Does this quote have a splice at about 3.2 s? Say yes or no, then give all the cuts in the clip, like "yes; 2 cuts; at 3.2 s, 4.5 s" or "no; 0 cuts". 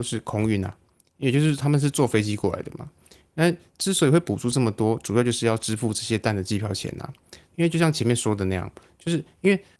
no; 1 cut; at 7.5 s